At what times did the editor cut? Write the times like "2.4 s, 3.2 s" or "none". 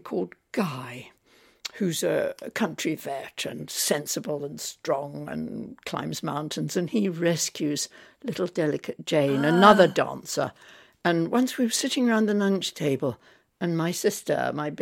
none